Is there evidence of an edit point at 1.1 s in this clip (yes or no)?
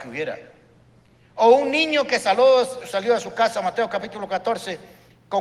no